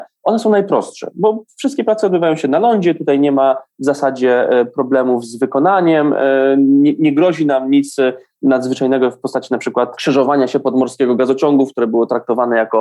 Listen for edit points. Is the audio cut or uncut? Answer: uncut